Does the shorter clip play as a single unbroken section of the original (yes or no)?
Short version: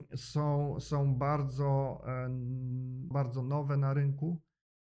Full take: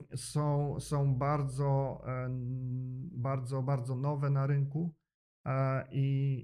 no